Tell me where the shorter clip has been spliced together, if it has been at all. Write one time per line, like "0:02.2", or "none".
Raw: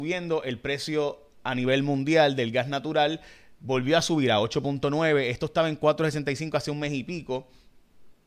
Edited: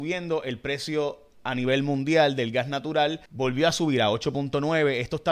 0:03.3